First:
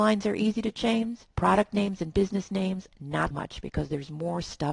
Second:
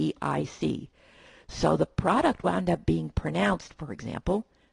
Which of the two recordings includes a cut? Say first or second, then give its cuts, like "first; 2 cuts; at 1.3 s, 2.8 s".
first; 2 cuts; at 1.3 s, 3.3 s